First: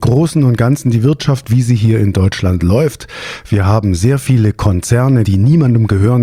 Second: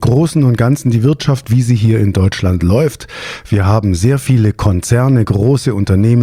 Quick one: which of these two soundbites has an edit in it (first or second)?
first